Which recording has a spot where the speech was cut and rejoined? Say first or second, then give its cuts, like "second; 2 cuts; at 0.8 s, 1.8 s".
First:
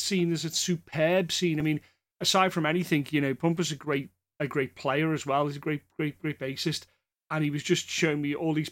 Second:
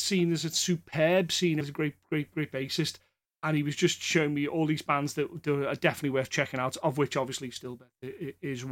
second; 1 cut; at 1.6 s